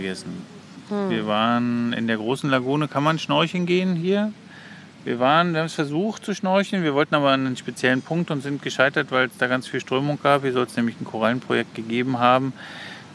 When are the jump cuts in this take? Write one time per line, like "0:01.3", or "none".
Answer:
none